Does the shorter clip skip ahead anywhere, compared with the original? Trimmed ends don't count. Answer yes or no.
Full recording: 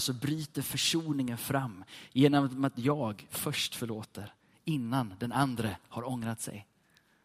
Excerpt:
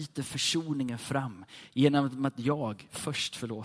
no